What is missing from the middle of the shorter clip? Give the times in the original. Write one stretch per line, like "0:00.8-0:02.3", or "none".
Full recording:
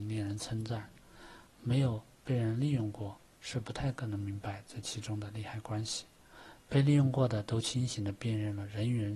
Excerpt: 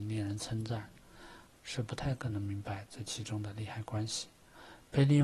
0:01.5-0:03.3